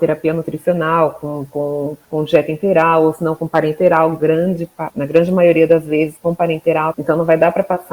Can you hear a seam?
yes; 2 cuts; at 4.9 s, 6.9 s

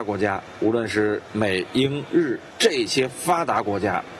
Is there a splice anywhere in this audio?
yes; 1 cut; at 2.5 s

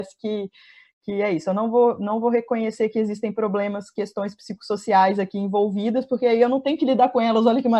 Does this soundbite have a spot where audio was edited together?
no; 0 cuts

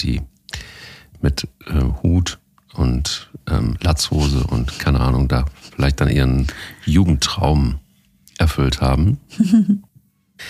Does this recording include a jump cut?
no; 0 cuts

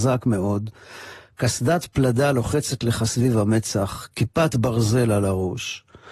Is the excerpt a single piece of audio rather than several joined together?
yes; 0 cuts

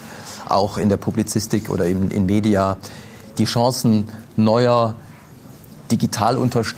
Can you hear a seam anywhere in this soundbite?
no; 0 cuts

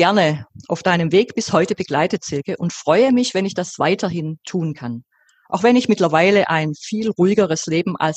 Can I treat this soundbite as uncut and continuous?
yes; 0 cuts

